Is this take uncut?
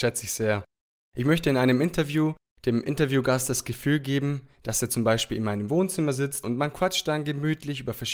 no; 1 cut; at 6.4 s

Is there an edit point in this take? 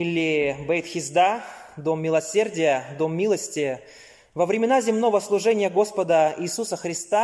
no; 0 cuts

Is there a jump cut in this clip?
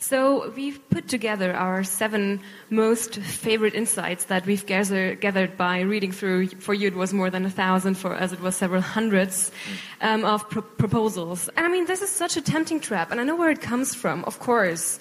yes; 1 cut; at 11.5 s

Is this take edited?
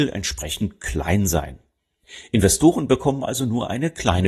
no; 0 cuts

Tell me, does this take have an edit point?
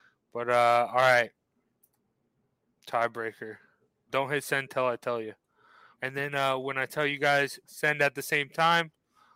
yes; 3 cuts; at 4.1 s, 6.0 s, 7.7 s

